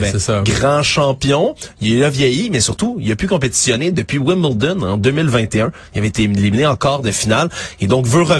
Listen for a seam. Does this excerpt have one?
no; 0 cuts

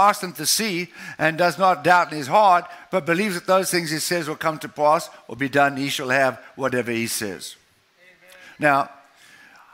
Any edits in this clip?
no; 0 cuts

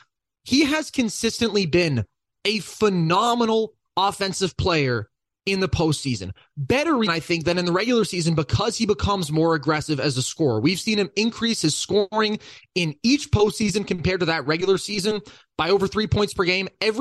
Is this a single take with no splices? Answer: no; 1 cut; at 7.1 s

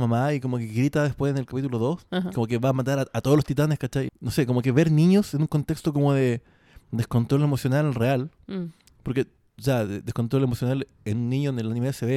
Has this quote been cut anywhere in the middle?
yes; 1 cut; at 4.1 s

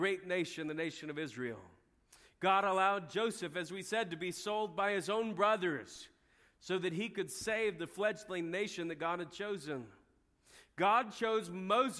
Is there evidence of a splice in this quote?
no; 0 cuts

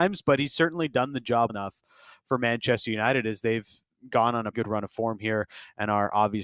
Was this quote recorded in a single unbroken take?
no; 2 cuts; at 1.5 s, 4.5 s

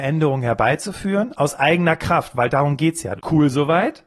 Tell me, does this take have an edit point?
yes; 1 cut; at 3.2 s

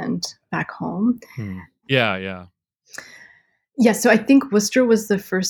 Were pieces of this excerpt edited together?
yes; 1 cut; at 1.8 s

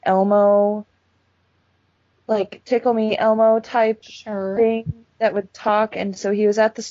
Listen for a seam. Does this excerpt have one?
no; 0 cuts

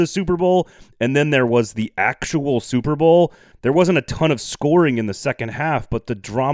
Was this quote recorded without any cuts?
yes; 0 cuts

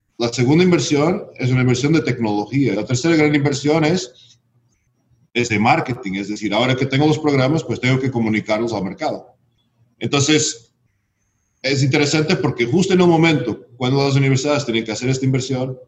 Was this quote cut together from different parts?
yes; 1 cut; at 2.7 s

